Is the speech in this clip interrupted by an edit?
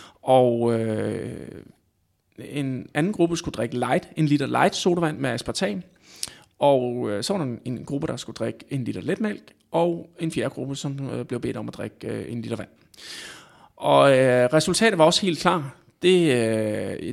no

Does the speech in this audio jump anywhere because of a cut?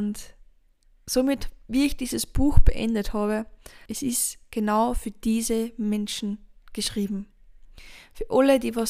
yes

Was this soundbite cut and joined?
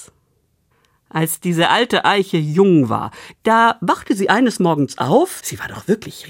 yes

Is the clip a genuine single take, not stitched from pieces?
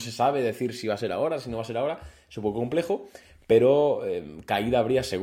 yes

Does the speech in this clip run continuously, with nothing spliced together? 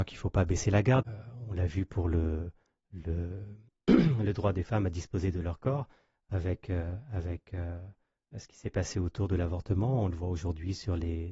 no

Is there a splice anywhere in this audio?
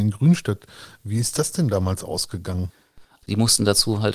yes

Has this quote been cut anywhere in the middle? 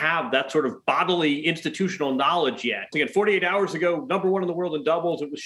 yes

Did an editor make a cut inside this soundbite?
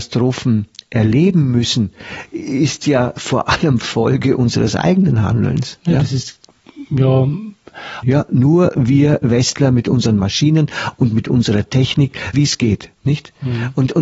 yes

